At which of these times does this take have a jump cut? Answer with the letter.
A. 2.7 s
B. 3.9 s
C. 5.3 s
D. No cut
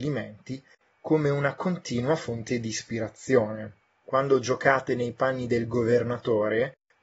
B